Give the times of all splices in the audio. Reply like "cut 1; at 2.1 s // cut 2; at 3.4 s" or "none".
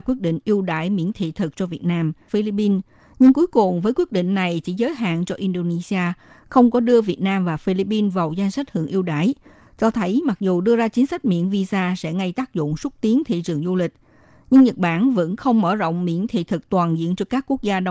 cut 1; at 2.3 s